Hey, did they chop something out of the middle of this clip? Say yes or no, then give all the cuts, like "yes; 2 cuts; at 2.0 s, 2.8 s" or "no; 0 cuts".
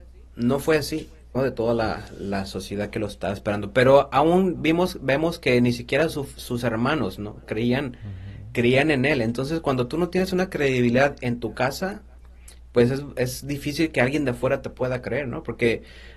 yes; 1 cut; at 1.3 s